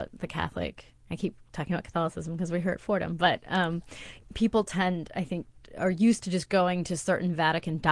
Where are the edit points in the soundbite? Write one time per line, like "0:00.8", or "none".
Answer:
0:04.2